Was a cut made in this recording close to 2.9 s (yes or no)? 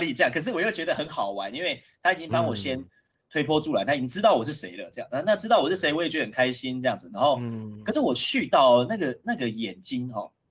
no